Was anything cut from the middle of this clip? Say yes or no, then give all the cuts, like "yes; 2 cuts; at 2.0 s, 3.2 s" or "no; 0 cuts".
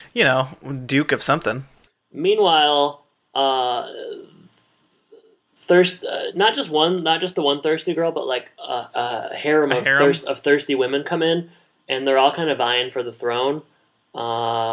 yes; 1 cut; at 8.9 s